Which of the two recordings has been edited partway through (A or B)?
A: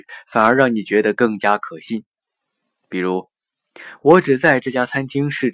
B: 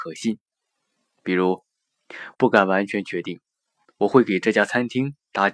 B